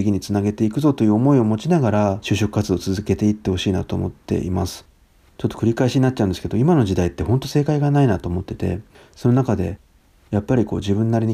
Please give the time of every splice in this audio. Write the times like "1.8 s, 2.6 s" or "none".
none